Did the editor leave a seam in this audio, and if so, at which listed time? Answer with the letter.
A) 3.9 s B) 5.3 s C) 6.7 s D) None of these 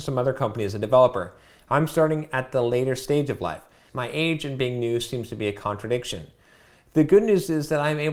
A